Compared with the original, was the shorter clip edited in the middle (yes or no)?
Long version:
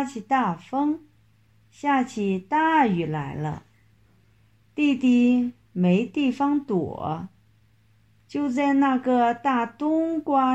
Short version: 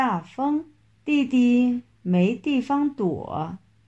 yes